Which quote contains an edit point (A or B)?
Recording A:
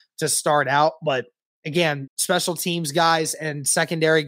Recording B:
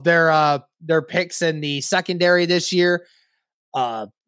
A